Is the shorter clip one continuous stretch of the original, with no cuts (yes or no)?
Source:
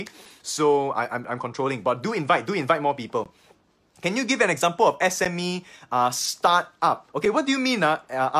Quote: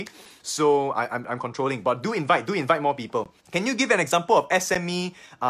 no